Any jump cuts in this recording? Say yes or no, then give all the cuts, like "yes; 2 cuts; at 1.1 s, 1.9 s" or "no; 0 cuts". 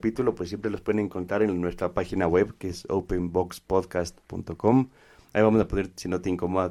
no; 0 cuts